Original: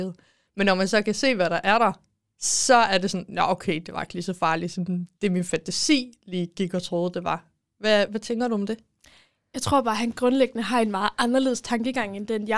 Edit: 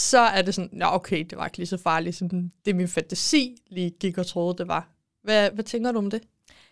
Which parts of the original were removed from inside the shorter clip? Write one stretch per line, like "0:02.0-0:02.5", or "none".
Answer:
none